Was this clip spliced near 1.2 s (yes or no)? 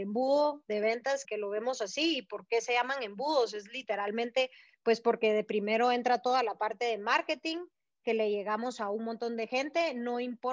yes